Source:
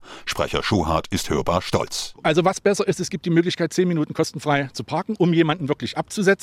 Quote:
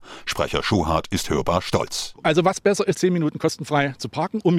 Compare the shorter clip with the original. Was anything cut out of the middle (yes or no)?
yes